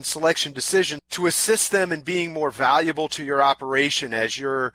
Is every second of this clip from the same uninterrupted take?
no; 1 cut; at 1.0 s

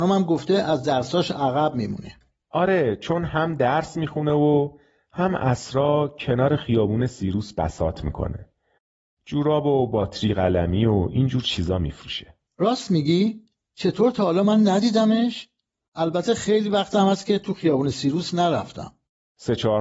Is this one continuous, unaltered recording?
yes; 0 cuts

